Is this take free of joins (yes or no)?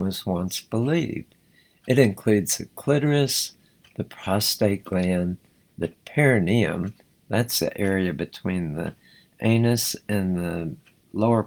yes